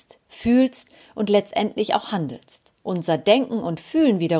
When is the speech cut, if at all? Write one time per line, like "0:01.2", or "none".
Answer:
0:02.8